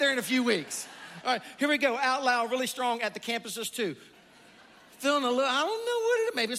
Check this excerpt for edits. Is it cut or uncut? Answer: cut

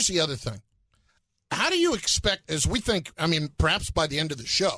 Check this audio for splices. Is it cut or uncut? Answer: cut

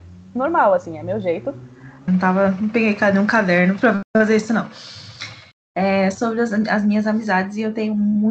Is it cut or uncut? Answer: cut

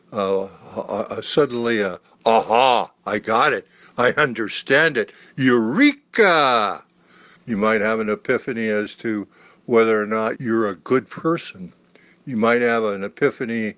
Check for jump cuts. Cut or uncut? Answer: cut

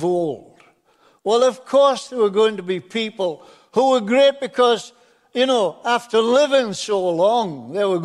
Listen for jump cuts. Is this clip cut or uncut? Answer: uncut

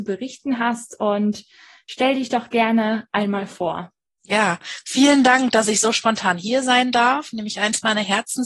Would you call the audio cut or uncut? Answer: uncut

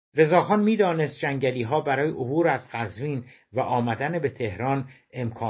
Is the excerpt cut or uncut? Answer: uncut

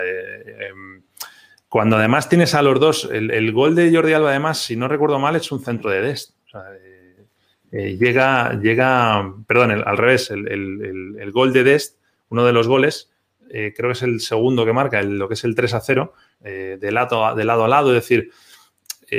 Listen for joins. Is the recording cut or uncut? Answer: cut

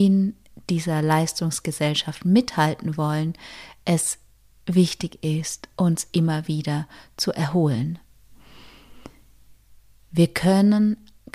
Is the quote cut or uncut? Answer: cut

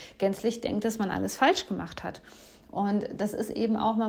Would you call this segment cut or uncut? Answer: uncut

